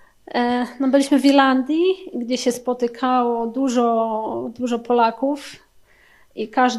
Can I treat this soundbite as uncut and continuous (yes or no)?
yes